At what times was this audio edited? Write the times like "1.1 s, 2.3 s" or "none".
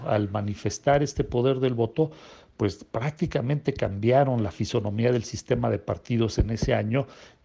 none